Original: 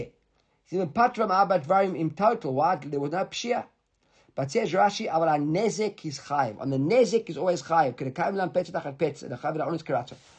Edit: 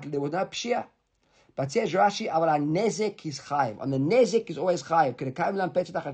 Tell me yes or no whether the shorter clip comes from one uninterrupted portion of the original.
yes